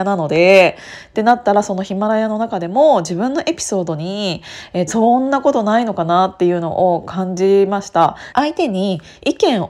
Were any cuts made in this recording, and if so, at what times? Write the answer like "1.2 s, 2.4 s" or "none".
4.9 s, 8.3 s

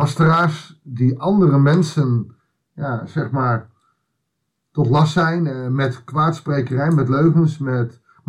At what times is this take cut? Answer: none

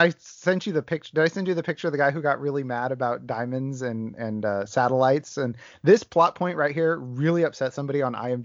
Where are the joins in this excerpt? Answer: none

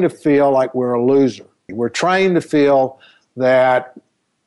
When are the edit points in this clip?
1.7 s

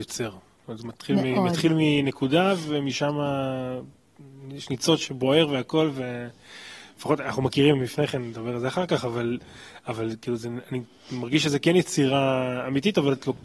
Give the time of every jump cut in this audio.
none

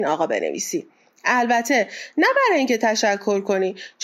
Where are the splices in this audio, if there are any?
none

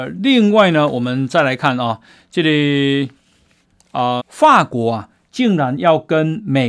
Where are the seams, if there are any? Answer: 4.2 s

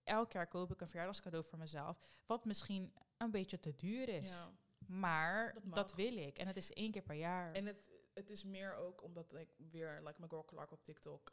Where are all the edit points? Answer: none

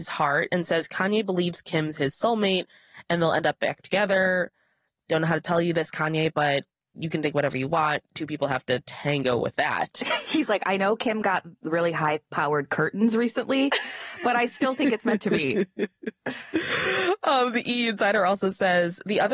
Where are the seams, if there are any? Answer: none

